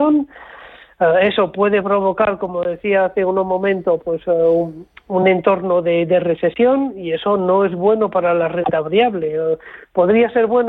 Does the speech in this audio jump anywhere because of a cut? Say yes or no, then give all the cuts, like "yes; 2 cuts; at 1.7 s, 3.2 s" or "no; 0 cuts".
no; 0 cuts